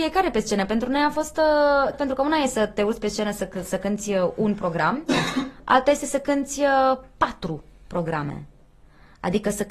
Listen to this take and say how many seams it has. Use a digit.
1